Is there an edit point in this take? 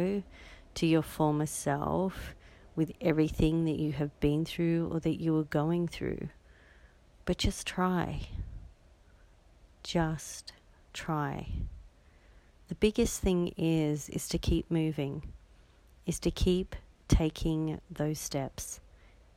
no; 0 cuts

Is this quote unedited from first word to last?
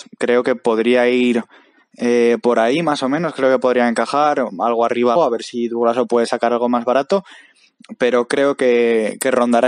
no; 1 cut; at 5.2 s

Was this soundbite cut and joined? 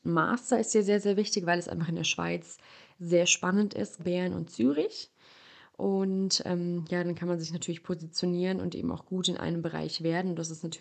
yes; 1 cut; at 4.0 s

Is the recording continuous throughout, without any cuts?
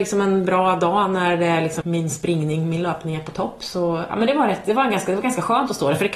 no; 1 cut; at 1.8 s

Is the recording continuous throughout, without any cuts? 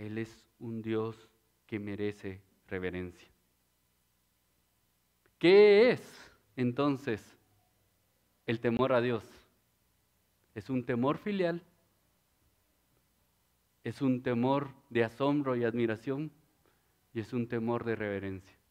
yes; 0 cuts

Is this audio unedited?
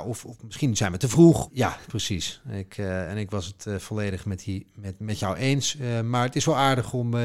no; 1 cut; at 1.5 s

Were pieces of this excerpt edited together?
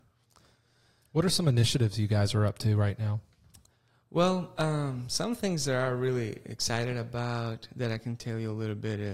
no; 0 cuts

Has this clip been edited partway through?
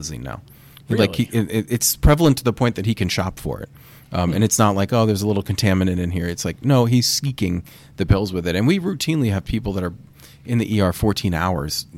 no; 0 cuts

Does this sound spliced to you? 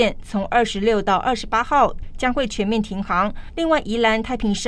yes; 1 cut; at 3.5 s

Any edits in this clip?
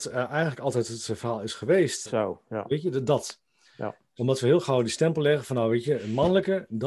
yes; 1 cut; at 2.1 s

